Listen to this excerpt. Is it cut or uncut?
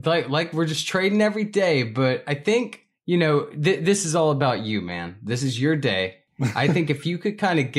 uncut